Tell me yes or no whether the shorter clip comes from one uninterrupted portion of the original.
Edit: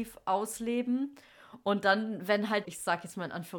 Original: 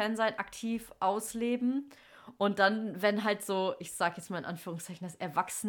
no